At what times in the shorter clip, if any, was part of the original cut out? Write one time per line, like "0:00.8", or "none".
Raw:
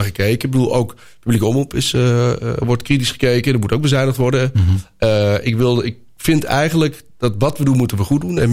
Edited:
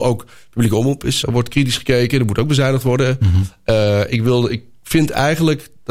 0:01.2